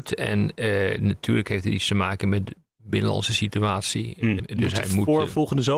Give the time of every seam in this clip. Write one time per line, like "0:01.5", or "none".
0:04.4